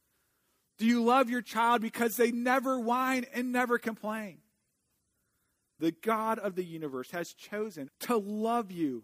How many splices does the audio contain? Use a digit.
2